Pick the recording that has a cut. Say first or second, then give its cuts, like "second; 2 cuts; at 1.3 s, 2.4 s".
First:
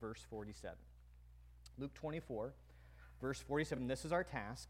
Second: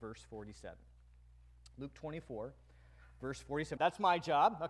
second; 1 cut; at 3.8 s